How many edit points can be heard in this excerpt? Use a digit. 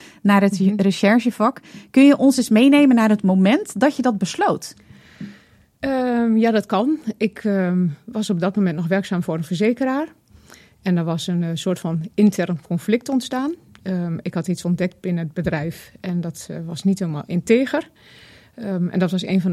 0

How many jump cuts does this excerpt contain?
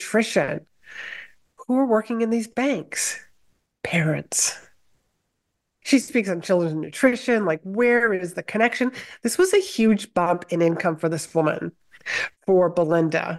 1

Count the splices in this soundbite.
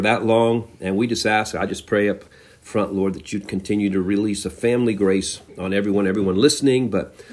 0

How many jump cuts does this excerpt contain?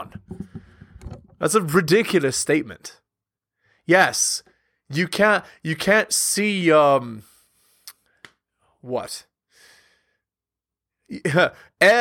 0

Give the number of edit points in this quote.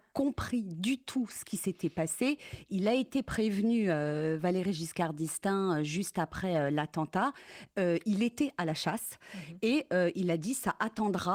0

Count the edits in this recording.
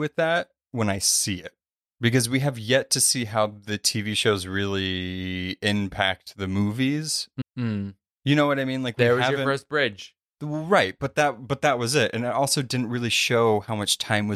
1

